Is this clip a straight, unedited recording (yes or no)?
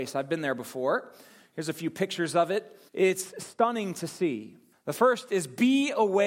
no